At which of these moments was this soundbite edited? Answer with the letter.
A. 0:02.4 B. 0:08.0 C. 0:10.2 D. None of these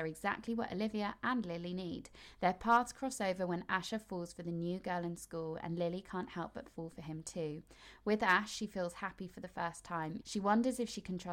C